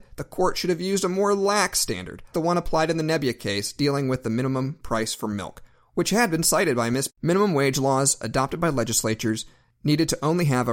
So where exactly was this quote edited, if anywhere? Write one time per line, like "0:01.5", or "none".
0:02.3
0:07.1